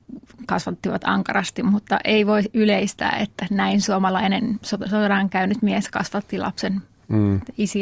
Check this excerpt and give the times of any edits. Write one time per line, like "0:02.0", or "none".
none

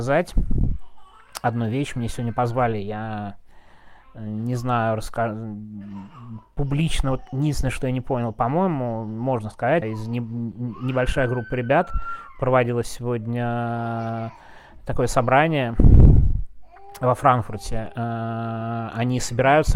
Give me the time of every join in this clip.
0:09.8

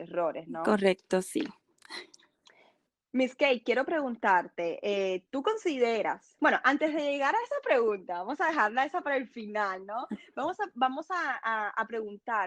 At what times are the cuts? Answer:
none

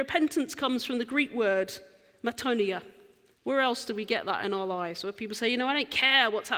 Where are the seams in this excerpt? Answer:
0:03.4

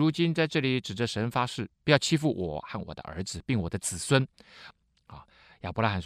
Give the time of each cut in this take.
0:01.7
0:04.7

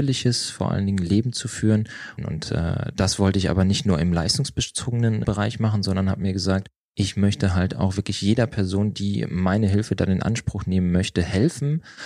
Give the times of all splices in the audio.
0:02.2
0:05.2

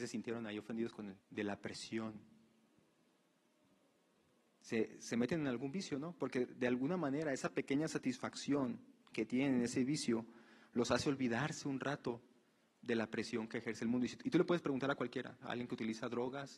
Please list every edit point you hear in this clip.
0:01.2
0:15.4

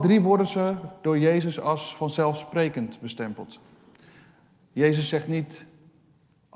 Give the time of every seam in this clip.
none

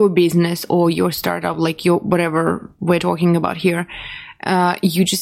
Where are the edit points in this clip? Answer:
none

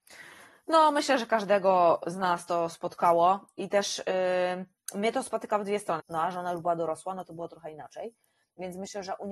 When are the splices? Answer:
0:06.0

